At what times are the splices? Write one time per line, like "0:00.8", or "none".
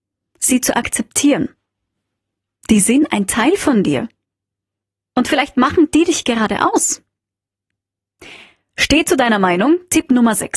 none

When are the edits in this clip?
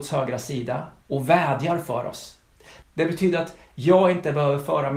0:02.8

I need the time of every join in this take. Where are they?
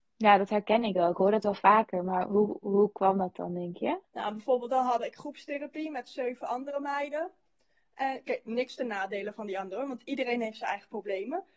none

